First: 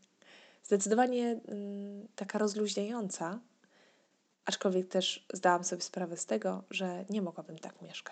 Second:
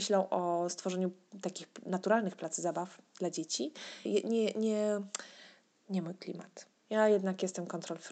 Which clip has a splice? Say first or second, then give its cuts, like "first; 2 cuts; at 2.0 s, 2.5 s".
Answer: second; 2 cuts; at 4.1 s, 6.8 s